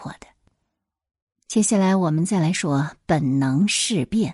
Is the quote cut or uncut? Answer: cut